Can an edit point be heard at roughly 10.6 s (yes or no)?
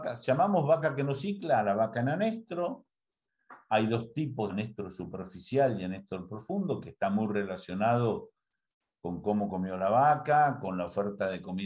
no